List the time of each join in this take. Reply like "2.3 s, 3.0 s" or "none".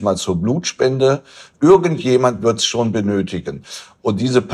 none